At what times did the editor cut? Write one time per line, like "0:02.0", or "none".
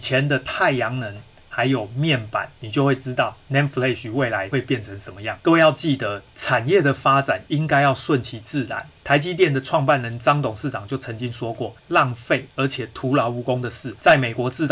0:05.4
0:11.8